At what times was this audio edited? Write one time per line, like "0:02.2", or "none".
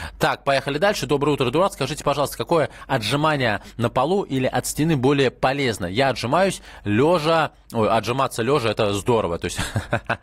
none